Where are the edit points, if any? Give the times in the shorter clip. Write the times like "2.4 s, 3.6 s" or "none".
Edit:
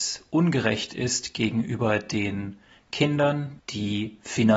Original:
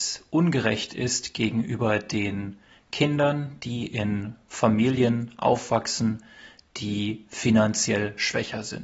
3.6 s